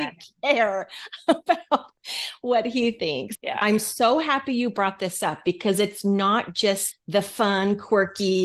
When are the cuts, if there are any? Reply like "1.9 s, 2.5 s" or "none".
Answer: 3.3 s, 6.9 s